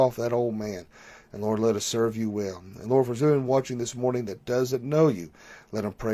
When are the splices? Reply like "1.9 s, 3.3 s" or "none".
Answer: none